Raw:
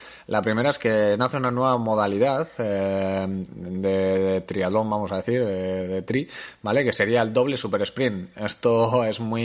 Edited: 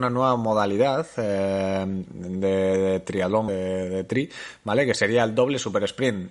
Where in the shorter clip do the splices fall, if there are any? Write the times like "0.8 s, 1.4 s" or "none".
3.5 s

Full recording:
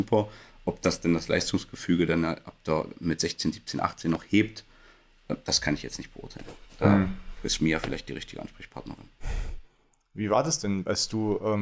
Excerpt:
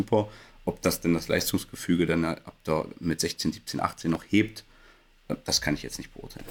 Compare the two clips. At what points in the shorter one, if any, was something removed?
none

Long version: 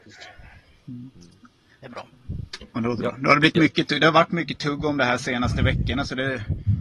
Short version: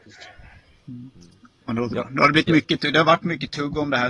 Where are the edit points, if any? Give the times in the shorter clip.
1.6 s

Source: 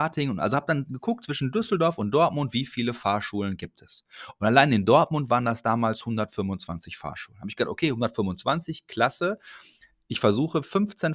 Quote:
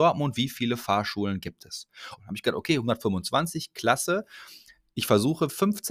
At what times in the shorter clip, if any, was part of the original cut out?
2.2 s

